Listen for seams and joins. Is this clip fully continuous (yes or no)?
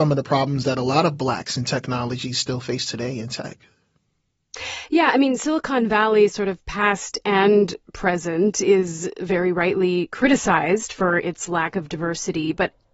yes